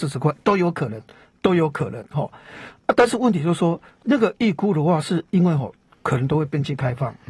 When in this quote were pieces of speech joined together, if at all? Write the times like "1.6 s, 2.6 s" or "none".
none